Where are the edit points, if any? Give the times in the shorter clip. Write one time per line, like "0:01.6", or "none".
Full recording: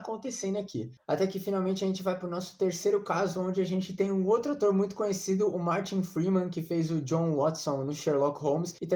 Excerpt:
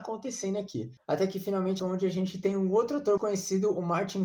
0:01.8
0:03.2